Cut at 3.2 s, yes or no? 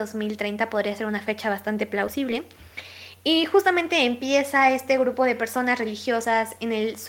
no